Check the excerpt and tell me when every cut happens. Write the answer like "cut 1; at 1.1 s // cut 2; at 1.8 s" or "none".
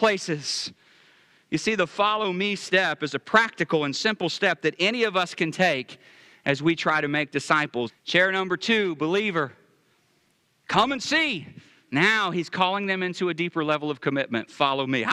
cut 1; at 7.9 s